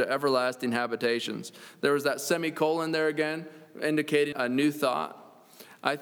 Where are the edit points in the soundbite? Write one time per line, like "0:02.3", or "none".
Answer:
0:04.3